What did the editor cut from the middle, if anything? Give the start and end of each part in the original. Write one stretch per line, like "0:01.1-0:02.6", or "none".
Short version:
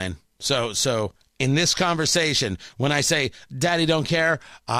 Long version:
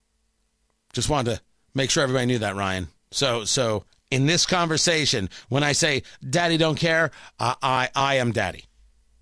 none